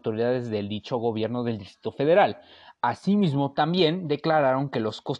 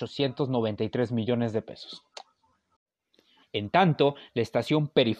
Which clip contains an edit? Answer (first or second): second